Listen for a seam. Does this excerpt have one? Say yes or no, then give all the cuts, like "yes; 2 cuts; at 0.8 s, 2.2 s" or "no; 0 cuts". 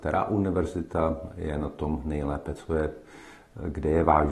no; 0 cuts